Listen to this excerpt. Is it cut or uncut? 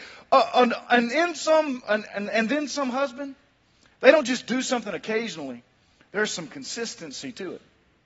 uncut